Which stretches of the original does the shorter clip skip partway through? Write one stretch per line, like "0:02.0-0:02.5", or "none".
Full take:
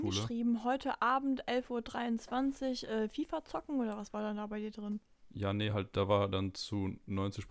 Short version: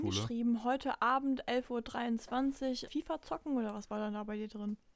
0:02.9-0:03.1